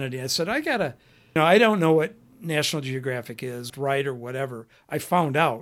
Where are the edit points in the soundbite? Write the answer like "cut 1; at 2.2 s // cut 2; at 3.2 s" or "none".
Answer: cut 1; at 1.4 s // cut 2; at 3.7 s